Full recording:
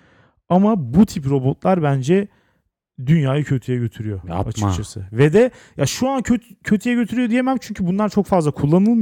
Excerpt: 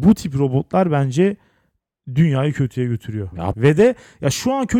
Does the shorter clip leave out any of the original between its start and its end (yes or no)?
yes